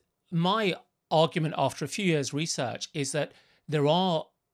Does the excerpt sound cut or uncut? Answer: uncut